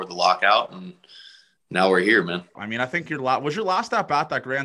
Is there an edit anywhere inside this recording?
yes; 1 cut; at 2.6 s

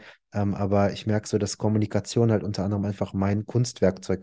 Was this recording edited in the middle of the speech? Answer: no; 0 cuts

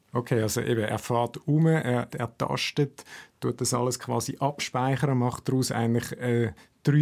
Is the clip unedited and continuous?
no; 1 cut; at 2.1 s

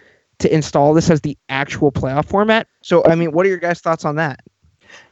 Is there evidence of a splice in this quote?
yes; 1 cut; at 2.7 s

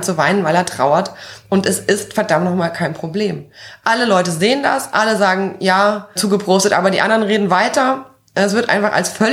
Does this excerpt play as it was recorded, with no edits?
no; 1 cut; at 6.2 s

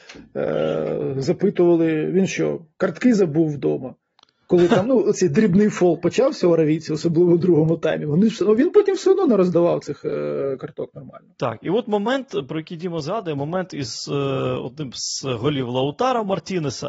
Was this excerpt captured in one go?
yes; 0 cuts

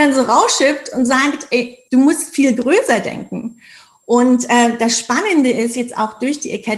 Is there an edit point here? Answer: yes; 1 cut; at 1.9 s

